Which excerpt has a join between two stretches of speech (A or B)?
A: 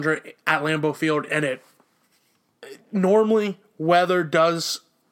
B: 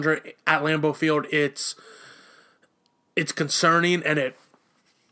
A